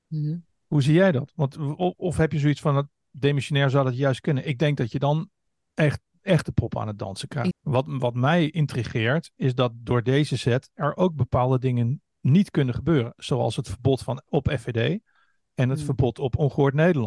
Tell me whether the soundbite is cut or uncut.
cut